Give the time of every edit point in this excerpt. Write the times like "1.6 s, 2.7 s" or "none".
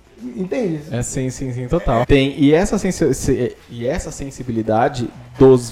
2.0 s